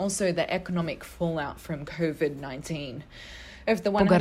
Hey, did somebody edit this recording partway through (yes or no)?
no